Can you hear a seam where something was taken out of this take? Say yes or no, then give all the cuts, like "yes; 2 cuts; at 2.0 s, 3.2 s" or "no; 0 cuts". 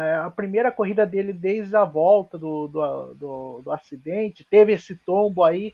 no; 0 cuts